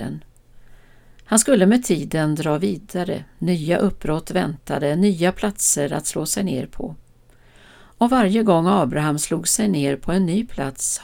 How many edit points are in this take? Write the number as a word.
zero